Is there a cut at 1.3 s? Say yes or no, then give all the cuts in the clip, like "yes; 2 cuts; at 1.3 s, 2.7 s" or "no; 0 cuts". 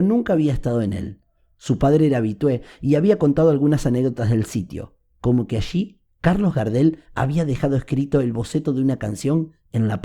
no; 0 cuts